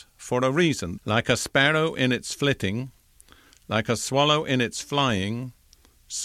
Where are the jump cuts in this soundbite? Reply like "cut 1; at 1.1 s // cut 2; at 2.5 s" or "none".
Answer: cut 1; at 1.0 s